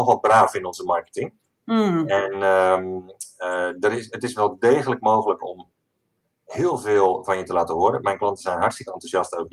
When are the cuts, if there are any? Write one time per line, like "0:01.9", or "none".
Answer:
none